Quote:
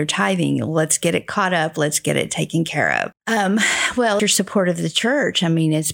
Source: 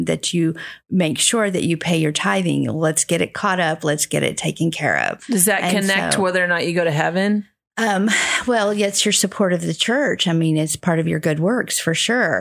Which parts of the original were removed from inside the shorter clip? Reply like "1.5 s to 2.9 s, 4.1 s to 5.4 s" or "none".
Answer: 5.2 s to 7.6 s, 8.7 s to 9.0 s